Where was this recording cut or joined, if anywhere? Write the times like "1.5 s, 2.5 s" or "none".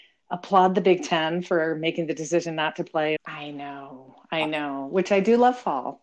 3.2 s